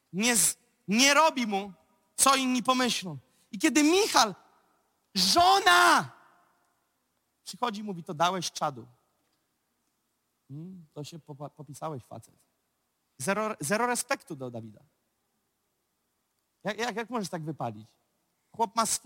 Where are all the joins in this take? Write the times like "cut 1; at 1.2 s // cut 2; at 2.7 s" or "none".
none